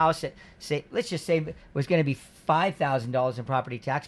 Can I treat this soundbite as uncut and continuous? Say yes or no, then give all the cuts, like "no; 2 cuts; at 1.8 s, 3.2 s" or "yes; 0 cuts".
yes; 0 cuts